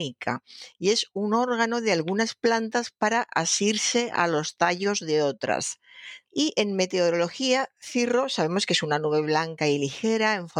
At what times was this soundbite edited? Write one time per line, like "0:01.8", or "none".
0:06.3